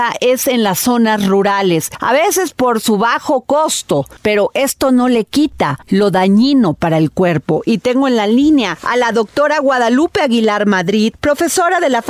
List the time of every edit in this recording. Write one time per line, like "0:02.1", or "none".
none